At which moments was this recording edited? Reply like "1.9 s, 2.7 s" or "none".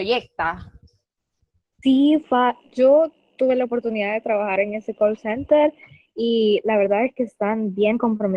none